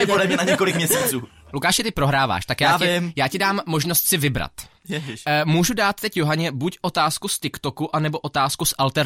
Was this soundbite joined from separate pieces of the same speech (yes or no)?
no